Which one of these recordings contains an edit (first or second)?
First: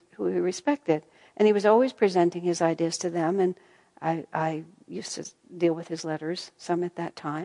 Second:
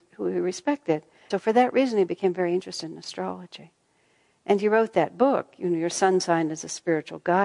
second